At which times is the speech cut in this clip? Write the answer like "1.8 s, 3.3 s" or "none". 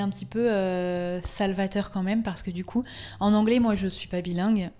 none